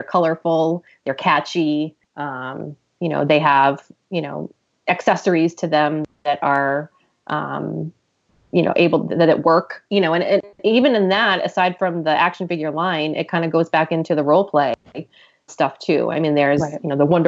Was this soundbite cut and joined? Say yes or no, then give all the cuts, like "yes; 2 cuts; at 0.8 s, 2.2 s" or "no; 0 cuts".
yes; 2 cuts; at 2.0 s, 15.5 s